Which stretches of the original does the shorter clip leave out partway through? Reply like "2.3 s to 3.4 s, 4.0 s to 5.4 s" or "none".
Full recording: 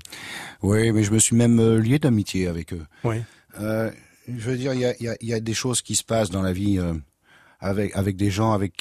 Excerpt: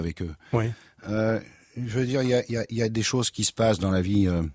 none